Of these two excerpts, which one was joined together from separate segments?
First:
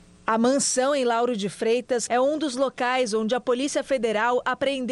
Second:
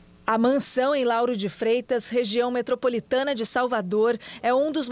first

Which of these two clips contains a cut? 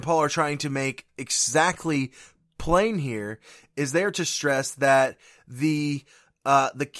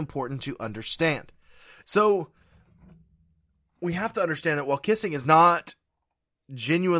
second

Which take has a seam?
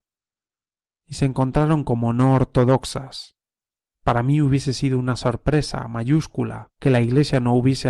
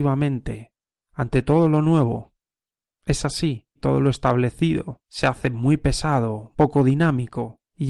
second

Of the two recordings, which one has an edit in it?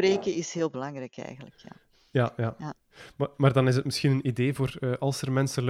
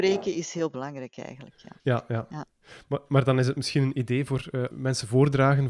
second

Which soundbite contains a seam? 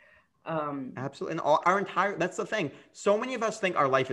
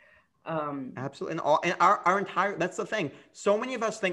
first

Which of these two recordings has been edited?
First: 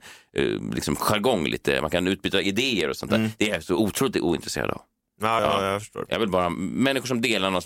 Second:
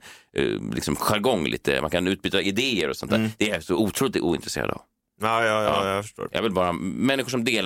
first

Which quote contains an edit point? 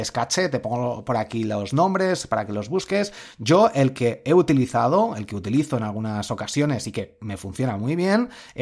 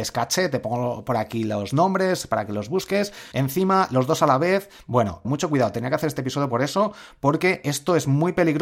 second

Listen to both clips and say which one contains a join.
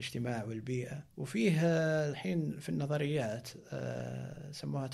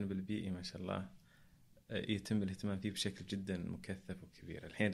first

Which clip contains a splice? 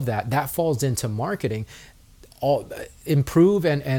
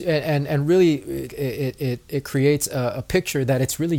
second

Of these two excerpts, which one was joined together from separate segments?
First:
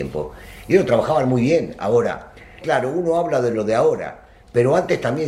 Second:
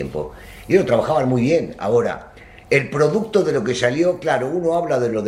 first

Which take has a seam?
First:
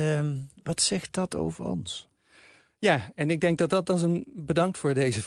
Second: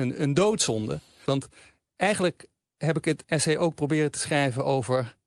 second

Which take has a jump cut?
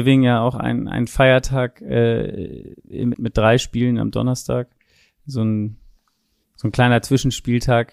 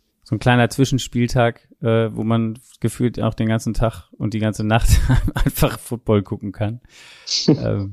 first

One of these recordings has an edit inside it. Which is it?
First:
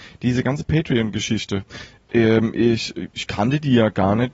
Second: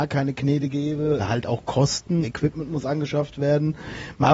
second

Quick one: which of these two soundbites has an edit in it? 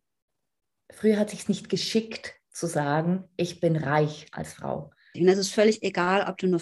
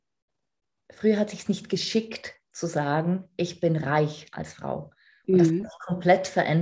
first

